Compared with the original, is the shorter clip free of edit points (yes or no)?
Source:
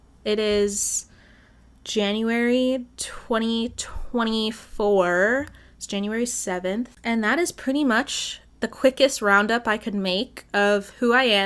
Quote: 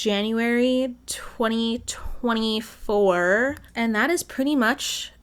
no